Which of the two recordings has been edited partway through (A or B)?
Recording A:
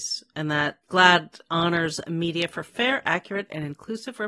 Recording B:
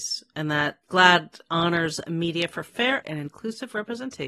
B